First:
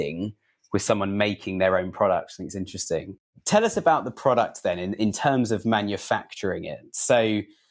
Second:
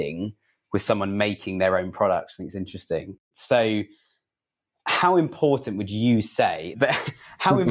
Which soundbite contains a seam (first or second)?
second